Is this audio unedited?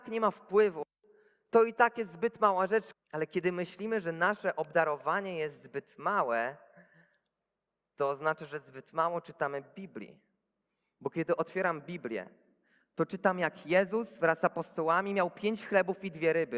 no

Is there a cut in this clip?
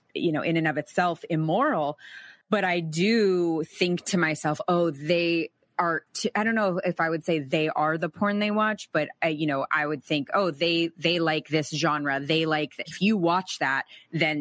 yes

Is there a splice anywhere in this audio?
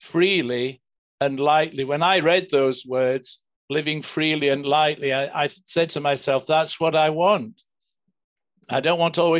no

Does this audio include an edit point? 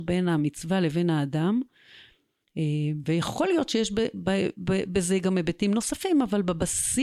no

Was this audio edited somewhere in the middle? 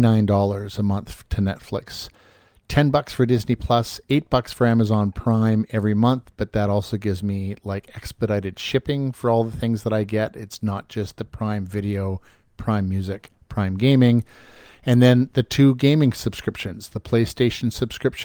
no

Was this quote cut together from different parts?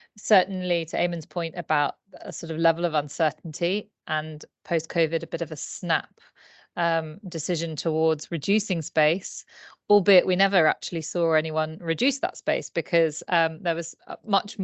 no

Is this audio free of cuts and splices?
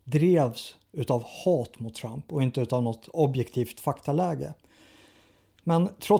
yes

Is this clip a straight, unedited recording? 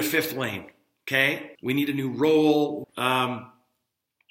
no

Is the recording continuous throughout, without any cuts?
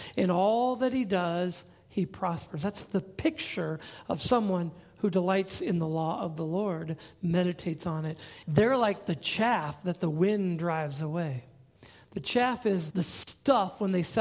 no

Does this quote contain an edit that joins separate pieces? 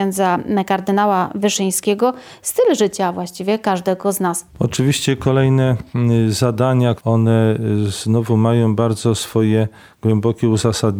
yes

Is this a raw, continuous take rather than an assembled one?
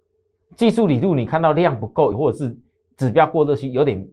no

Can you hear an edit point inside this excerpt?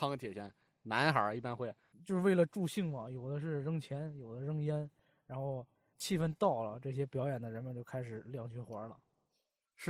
yes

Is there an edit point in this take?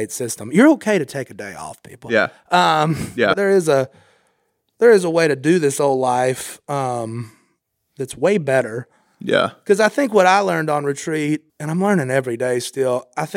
yes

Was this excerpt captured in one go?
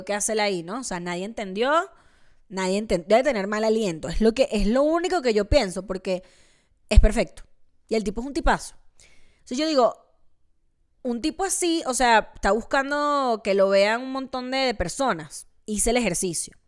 yes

